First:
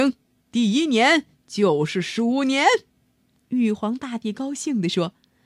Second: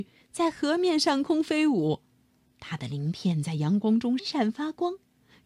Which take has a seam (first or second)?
second